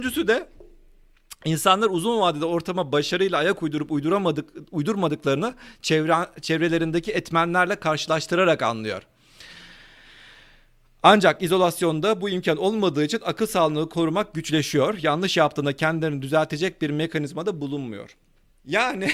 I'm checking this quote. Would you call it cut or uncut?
uncut